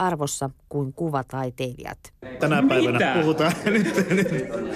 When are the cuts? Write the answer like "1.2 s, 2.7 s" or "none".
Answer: 2.4 s